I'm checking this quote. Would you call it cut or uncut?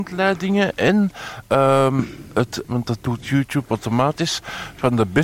cut